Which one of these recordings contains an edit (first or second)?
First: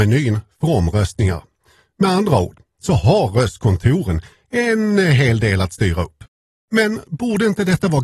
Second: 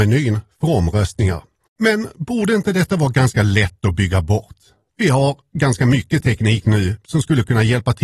second